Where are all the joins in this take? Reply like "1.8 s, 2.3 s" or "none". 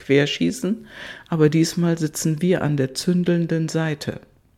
none